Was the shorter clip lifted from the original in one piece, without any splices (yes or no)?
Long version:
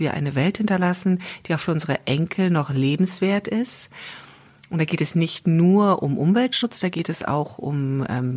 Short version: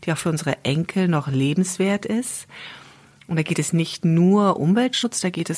no